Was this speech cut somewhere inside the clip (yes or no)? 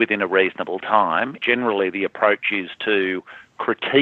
yes